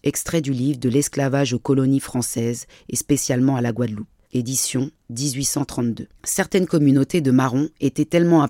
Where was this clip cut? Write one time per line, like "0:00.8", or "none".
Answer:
0:04.2
0:06.1